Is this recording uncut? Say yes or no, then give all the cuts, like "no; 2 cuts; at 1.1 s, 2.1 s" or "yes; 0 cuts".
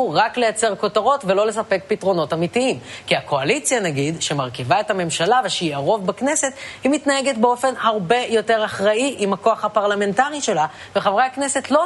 yes; 0 cuts